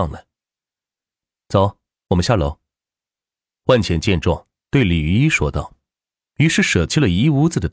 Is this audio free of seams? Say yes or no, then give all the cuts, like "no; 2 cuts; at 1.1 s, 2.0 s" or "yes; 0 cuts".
yes; 0 cuts